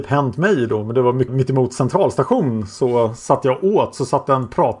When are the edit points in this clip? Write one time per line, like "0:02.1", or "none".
0:01.3